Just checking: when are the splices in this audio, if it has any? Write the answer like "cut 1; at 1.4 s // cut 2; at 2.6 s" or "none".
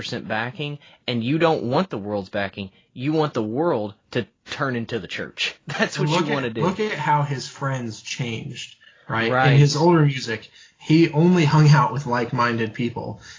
none